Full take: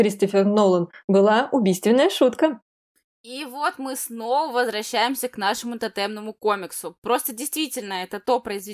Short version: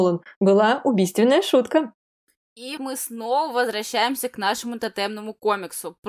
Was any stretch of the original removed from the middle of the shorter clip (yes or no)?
yes